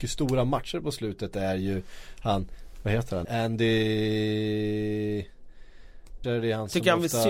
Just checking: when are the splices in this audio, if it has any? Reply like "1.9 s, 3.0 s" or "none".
3.2 s, 6.2 s